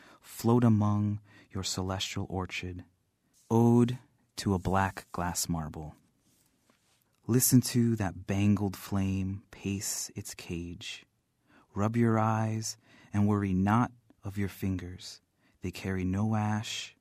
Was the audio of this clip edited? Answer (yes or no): yes